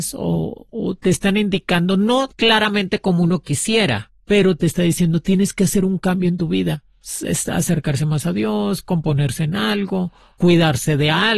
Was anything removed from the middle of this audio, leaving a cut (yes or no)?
no